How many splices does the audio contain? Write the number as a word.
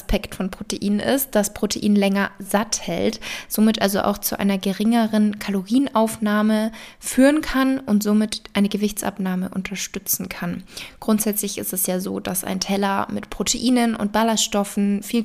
zero